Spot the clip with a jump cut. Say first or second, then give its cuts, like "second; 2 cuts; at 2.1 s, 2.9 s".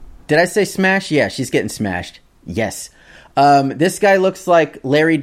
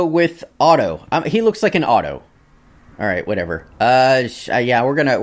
second; 1 cut; at 2.9 s